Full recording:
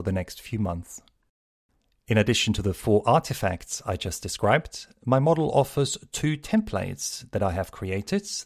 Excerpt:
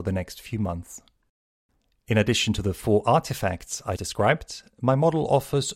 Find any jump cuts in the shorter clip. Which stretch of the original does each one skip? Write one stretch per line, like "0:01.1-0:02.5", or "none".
0:04.0-0:04.2

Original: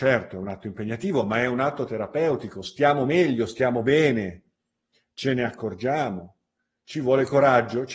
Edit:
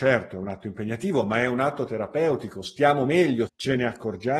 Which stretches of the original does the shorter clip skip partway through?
0:03.5-0:05.1

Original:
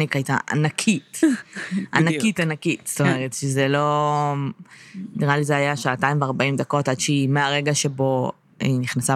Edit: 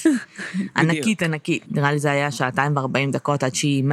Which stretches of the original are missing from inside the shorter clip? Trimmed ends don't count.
0:02.8-0:05.1

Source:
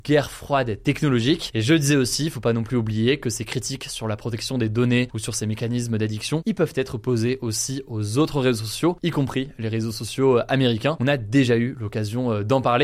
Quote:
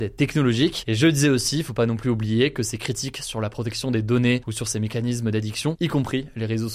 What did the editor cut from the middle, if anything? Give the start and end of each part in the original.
0:06.4-0:09.0

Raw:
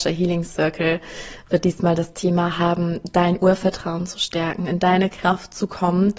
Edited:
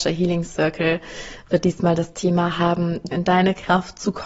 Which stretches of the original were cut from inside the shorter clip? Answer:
0:03.1-0:04.7

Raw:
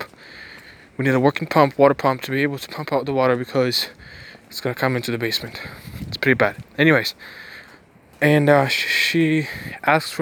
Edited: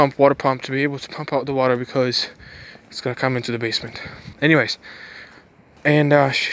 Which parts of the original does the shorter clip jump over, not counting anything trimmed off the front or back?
0:05.9-0:06.7

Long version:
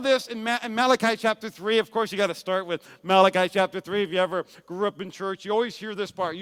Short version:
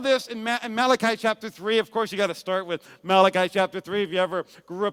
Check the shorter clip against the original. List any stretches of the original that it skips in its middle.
none

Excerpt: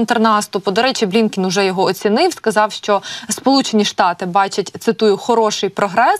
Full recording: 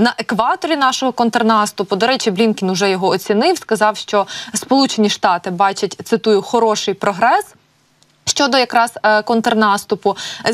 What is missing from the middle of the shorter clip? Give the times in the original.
none

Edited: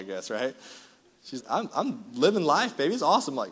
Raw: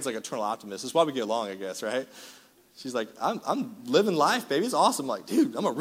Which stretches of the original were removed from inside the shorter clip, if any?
0:02.9-0:03.1

